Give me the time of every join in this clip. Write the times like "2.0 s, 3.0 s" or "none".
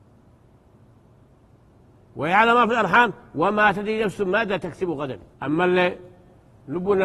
5.3 s